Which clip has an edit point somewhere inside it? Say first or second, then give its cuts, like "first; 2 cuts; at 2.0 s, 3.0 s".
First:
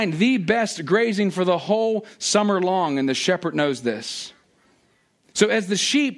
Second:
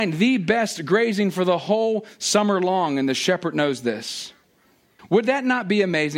second; 1 cut; at 5.0 s